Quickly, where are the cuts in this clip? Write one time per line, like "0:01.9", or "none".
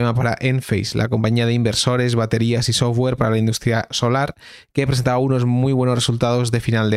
none